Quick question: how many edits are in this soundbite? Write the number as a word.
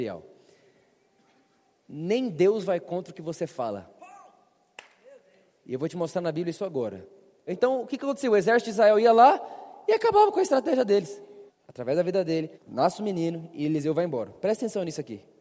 three